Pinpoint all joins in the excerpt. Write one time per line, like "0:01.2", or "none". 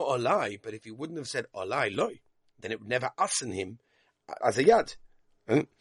0:04.4